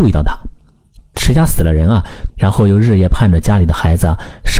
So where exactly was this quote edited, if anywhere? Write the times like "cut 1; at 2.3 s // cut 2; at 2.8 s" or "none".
cut 1; at 1.0 s // cut 2; at 2.3 s